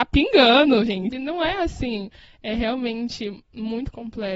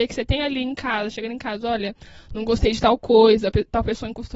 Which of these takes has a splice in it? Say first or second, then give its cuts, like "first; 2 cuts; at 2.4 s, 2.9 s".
first; 1 cut; at 1.1 s